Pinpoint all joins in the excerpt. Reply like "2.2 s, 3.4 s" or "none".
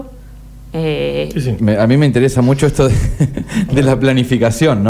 1.6 s